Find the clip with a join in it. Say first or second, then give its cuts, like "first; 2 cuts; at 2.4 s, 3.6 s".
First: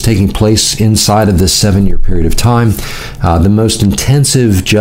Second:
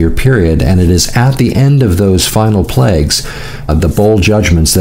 second; 1 cut; at 3.7 s